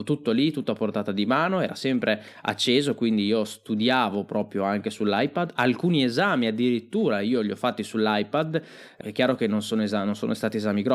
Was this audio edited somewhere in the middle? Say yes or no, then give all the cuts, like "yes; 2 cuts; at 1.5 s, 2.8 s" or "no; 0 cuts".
yes; 1 cut; at 9.0 s